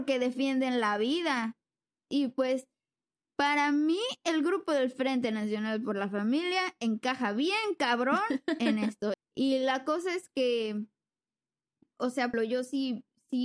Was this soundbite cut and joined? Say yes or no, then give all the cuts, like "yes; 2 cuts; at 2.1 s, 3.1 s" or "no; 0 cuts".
yes; 3 cuts; at 2.1 s, 9.1 s, 12.3 s